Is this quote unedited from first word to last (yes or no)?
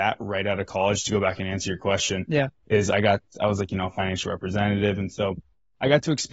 yes